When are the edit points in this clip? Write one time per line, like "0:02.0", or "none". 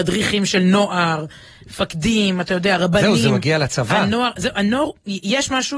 none